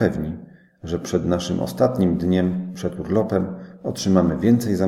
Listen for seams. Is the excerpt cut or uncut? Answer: uncut